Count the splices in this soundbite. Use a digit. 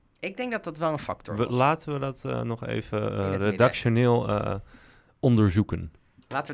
0